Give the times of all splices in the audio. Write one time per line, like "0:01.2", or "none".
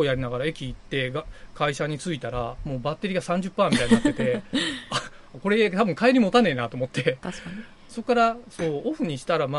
none